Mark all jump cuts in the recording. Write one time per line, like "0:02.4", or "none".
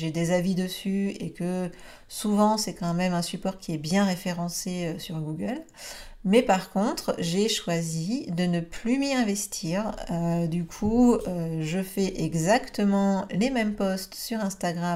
none